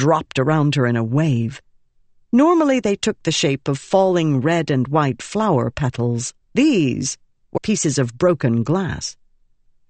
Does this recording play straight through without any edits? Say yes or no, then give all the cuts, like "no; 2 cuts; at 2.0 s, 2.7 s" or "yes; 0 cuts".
no; 2 cuts; at 6.4 s, 7.6 s